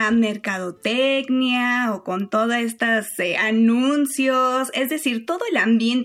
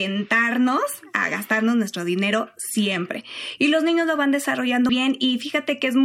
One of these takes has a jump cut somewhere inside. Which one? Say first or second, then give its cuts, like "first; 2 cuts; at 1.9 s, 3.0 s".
second; 1 cut; at 4.9 s